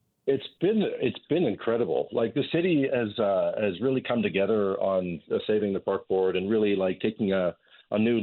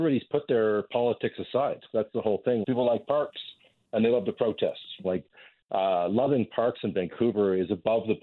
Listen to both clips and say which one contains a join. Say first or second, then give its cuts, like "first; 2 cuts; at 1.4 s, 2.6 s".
second; 2 cuts; at 2.6 s, 5.0 s